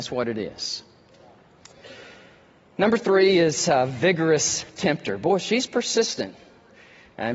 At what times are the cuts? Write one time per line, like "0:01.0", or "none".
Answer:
none